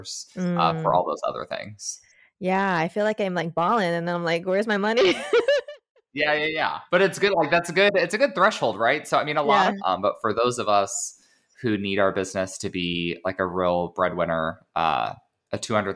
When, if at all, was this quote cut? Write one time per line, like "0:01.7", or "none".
0:06.9
0:09.8